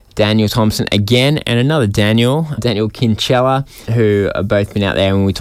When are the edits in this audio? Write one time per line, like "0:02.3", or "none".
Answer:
0:02.6
0:03.9